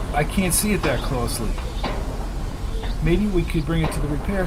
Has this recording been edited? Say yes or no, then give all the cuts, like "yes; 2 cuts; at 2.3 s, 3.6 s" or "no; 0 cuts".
no; 0 cuts